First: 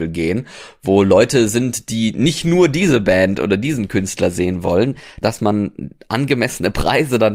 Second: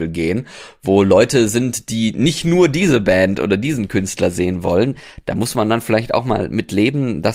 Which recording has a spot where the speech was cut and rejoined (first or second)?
first